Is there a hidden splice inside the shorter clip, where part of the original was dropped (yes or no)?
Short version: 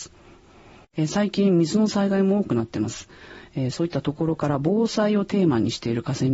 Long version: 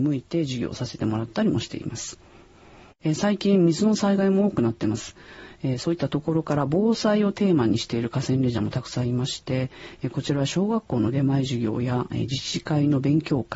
no